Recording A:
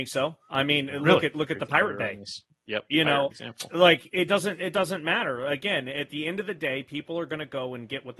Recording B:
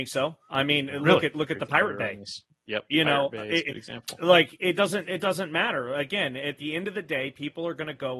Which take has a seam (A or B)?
A